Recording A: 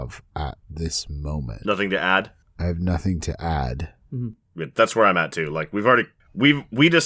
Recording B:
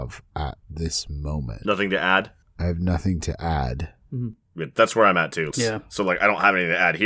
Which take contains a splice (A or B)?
B